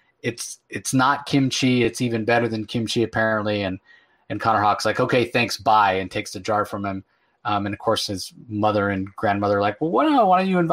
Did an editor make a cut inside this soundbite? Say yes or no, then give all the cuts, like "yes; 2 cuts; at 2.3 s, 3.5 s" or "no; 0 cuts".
no; 0 cuts